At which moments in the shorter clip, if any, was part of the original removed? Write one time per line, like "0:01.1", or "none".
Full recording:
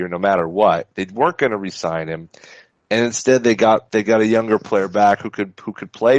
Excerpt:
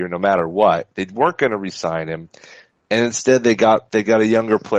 none